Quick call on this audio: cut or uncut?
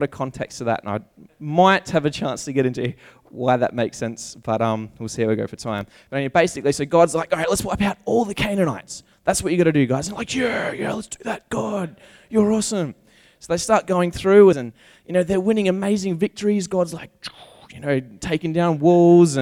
cut